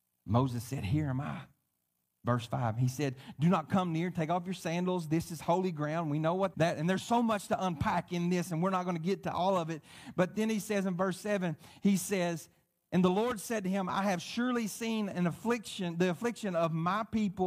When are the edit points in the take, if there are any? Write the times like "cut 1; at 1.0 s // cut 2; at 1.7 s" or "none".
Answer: cut 1; at 6.5 s